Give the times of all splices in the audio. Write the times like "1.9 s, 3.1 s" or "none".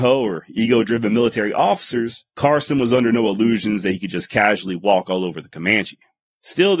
none